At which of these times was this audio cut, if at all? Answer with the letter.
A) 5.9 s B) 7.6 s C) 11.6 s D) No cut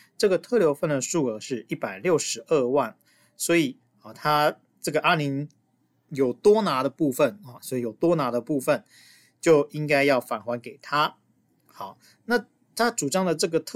B